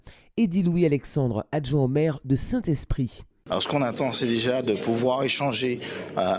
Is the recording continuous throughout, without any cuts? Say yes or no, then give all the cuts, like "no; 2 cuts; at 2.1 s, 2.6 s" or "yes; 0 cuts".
yes; 0 cuts